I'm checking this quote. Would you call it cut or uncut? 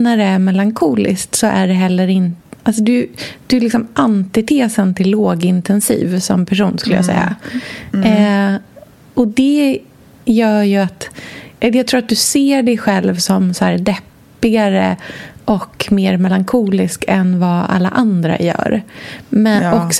uncut